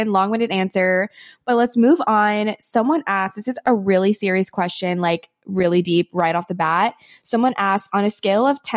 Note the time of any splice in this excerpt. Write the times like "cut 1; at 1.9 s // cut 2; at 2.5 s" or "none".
none